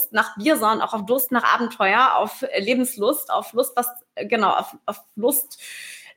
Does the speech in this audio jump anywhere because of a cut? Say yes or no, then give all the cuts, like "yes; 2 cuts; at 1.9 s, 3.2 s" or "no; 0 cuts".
no; 0 cuts